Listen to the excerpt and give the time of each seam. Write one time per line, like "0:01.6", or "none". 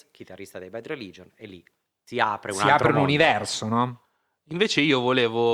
none